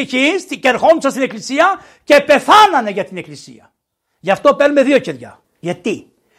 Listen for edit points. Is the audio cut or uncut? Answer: cut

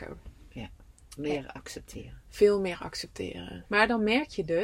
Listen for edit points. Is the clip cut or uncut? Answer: cut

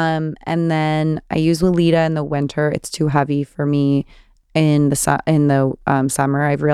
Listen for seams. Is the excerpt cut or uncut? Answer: uncut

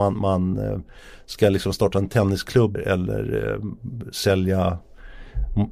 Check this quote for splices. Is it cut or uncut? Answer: cut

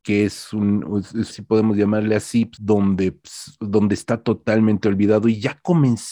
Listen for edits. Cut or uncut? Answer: cut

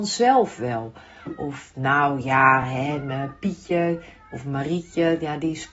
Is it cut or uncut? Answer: uncut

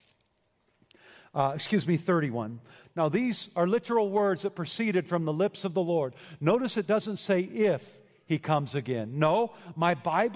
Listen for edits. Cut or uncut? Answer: cut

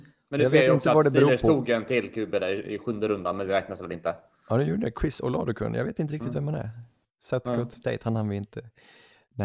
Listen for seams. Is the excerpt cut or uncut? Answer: uncut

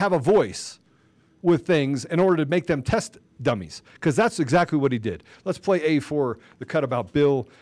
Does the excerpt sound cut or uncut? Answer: uncut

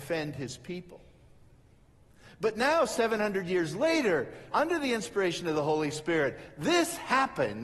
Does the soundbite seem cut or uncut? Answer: cut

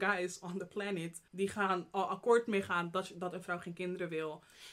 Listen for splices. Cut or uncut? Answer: cut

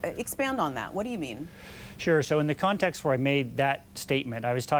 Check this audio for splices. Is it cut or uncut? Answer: uncut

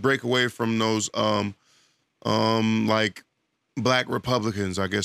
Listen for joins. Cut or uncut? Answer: uncut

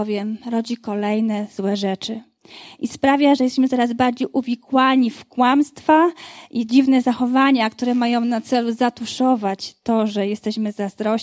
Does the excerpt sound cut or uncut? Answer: uncut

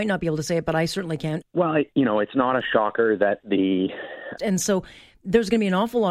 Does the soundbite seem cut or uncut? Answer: cut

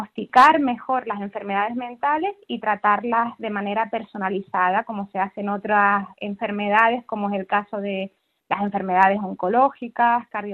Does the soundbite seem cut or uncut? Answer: uncut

